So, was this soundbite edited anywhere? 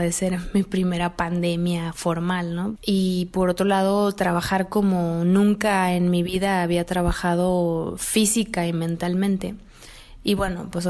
yes; 1 cut; at 2.8 s

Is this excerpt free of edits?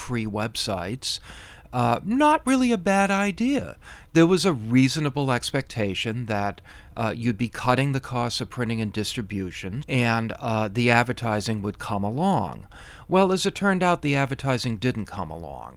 no; 1 cut; at 9.8 s

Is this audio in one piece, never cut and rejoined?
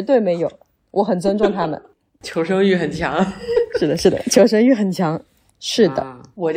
no; 1 cut; at 5.5 s

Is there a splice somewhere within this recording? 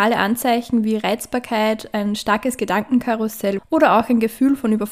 yes; 1 cut; at 3.6 s

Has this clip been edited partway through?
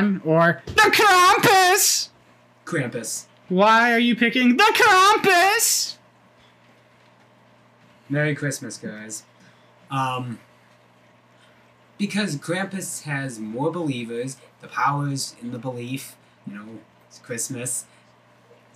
yes; 1 cut; at 16.4 s

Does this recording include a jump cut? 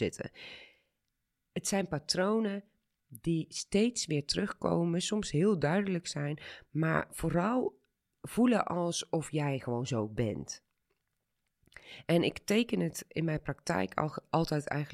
no; 0 cuts

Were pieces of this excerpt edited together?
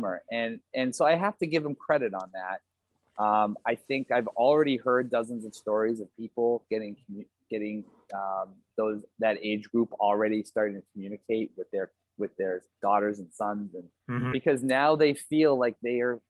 yes; 1 cut; at 14.3 s

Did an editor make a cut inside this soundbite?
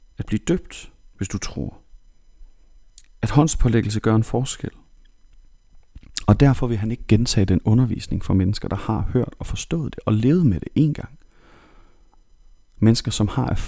no; 0 cuts

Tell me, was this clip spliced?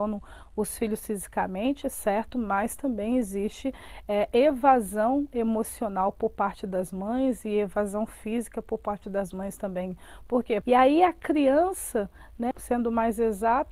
yes; 2 cuts; at 10.6 s, 12.5 s

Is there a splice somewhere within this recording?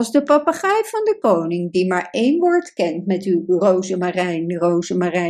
no; 0 cuts

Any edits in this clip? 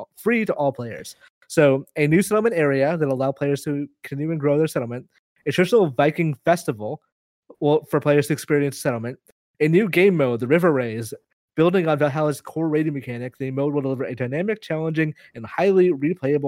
no; 0 cuts

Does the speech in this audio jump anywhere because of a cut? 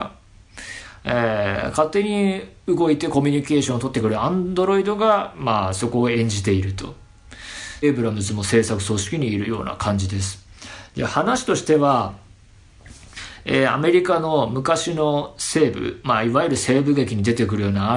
yes; 1 cut; at 7.8 s

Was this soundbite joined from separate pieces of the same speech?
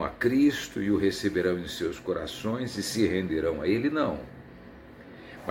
no; 0 cuts

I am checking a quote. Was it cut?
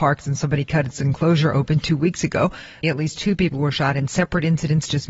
yes; 1 cut; at 2.8 s

